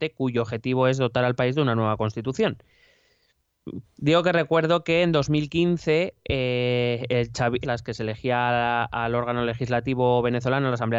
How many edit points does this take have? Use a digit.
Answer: 2